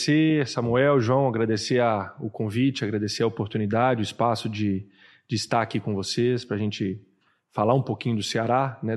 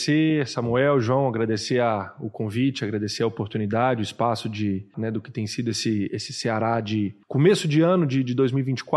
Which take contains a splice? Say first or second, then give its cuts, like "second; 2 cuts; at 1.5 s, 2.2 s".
second; 3 cuts; at 4.9 s, 6.1 s, 7.2 s